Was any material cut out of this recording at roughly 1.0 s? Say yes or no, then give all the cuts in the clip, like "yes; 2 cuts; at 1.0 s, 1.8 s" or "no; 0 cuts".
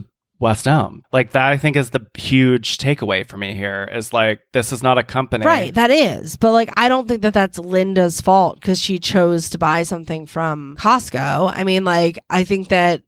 yes; 1 cut; at 1.0 s